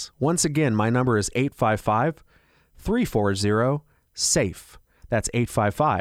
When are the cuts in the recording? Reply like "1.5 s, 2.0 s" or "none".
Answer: none